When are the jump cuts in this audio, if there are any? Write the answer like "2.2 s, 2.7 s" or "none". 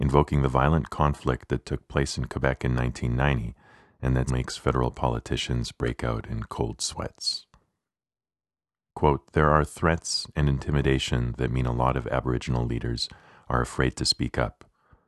4.3 s, 8.9 s